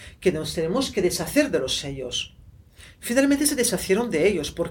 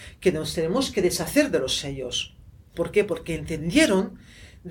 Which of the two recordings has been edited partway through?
second; 1 cut; at 2.7 s

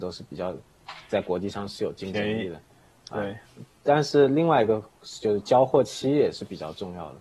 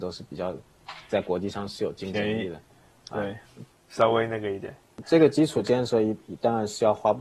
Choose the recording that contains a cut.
second; 1 cut; at 3.7 s

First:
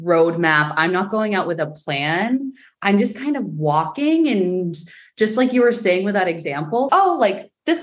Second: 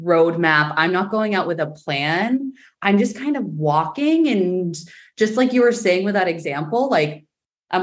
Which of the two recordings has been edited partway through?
first; 1 cut; at 6.9 s

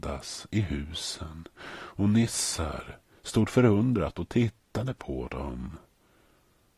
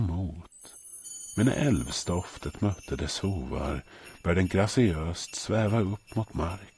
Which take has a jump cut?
first; 1 cut; at 3.2 s

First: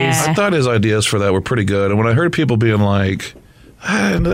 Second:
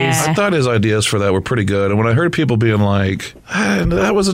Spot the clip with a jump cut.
second; 1 cut; at 3.4 s

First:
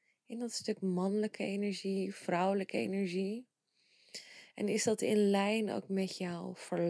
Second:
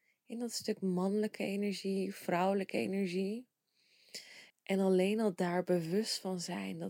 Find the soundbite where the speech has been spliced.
second; 1 cut; at 4.5 s

